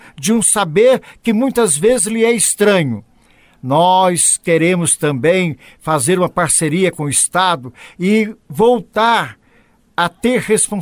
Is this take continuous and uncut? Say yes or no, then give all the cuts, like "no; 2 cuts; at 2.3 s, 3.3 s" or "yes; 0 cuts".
yes; 0 cuts